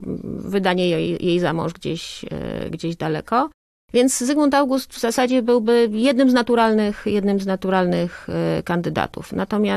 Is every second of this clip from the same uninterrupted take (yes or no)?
yes